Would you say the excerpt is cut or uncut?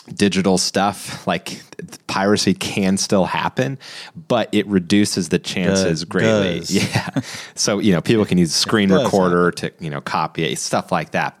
uncut